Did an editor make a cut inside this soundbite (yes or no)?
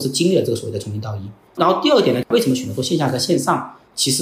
no